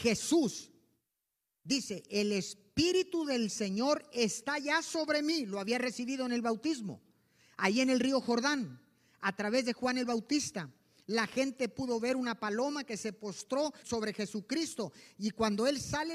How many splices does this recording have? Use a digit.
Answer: 1